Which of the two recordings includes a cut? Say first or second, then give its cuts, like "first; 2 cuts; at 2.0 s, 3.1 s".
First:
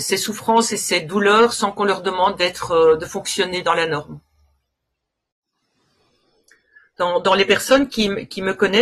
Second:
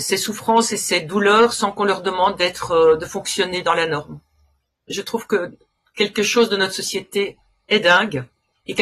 second; 1 cut; at 4.9 s